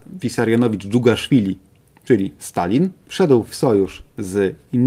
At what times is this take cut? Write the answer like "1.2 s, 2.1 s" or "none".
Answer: 3.0 s